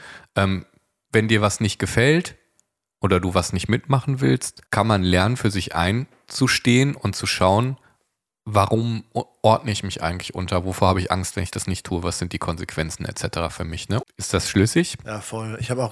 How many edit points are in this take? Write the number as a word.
two